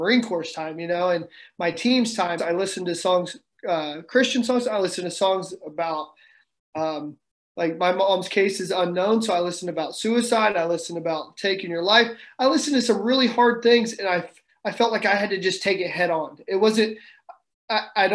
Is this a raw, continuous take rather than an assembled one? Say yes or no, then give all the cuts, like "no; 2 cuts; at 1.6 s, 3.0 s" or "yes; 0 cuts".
no; 1 cut; at 2.4 s